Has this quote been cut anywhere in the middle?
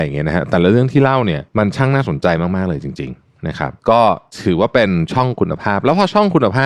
yes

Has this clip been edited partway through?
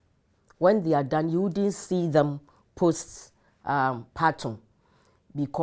no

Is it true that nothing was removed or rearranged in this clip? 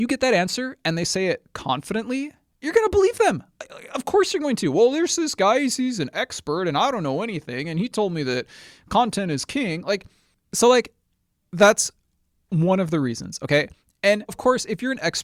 no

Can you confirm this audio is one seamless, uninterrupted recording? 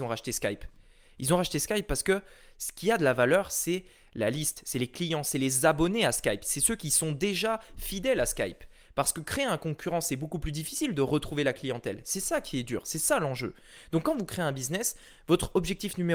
yes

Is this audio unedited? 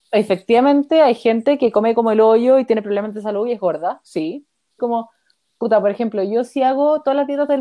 no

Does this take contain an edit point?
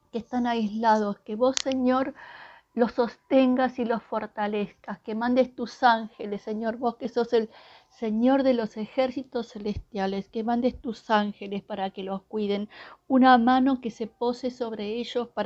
no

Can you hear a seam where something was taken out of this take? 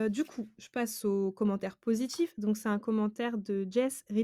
no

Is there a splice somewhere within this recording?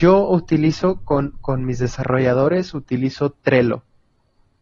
no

